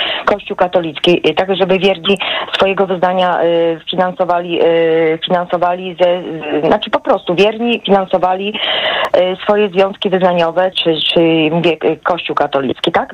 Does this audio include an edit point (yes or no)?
yes